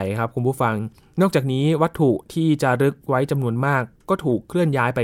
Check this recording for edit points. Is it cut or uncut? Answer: uncut